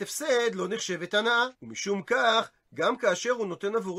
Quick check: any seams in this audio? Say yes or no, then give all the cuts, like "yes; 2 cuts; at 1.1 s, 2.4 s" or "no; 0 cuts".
yes; 1 cut; at 1.5 s